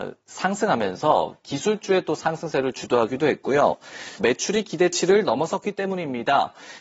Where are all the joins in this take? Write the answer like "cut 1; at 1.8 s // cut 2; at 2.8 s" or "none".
cut 1; at 4.2 s